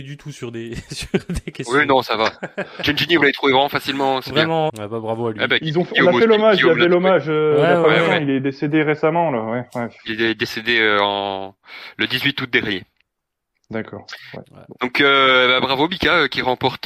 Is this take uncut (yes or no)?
no